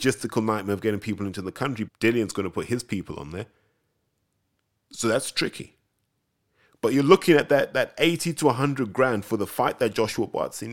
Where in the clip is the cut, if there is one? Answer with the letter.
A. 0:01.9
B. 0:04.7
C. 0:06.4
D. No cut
A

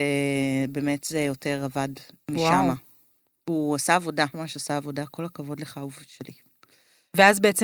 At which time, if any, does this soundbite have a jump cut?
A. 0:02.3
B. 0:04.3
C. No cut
B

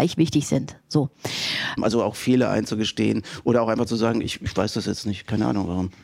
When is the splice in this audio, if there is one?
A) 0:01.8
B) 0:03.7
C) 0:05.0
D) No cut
A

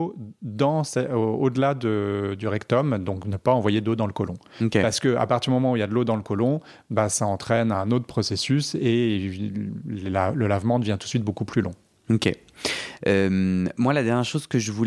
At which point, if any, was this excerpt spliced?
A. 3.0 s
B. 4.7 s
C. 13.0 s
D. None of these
C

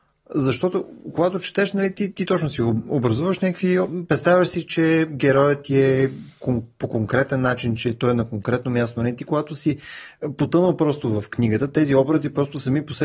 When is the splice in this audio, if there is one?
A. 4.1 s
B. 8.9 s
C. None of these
C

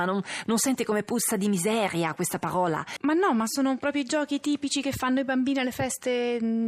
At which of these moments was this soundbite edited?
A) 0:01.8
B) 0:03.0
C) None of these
B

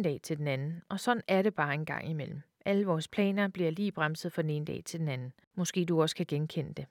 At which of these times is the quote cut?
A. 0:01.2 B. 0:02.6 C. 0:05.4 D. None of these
D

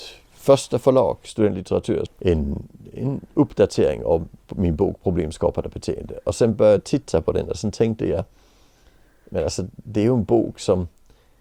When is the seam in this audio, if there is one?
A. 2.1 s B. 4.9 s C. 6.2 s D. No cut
A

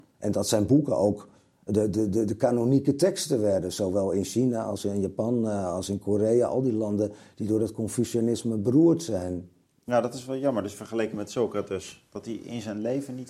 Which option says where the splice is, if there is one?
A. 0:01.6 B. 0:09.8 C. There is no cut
C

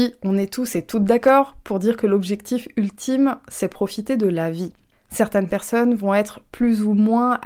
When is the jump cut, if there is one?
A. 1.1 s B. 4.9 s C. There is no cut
B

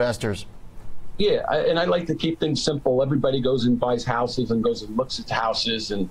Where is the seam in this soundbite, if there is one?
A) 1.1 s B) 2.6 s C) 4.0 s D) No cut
B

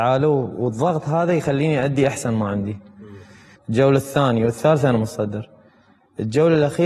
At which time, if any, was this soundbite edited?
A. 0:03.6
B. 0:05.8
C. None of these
A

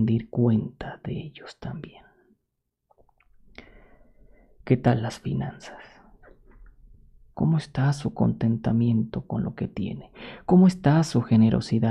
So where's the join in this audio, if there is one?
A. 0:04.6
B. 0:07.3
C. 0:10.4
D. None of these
B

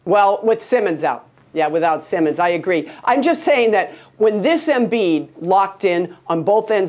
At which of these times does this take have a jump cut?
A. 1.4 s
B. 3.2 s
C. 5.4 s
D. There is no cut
C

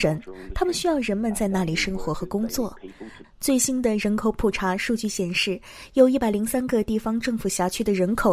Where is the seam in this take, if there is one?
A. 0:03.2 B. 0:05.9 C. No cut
A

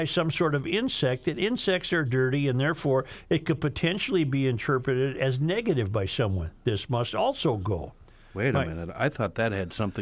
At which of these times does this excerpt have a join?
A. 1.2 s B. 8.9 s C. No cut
C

